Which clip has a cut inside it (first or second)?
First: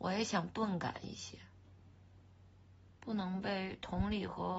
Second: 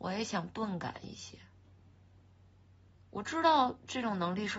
first